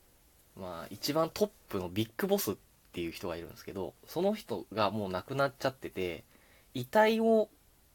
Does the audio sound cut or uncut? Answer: uncut